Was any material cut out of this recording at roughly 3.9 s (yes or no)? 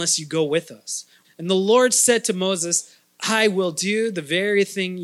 no